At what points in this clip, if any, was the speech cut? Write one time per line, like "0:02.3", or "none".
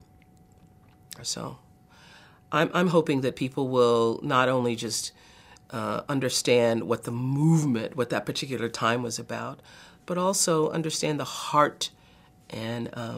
0:01.2